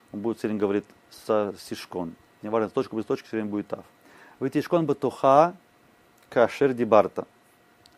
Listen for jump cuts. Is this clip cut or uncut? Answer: cut